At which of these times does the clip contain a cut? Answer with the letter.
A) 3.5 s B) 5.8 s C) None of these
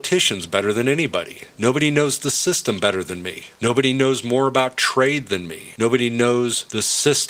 C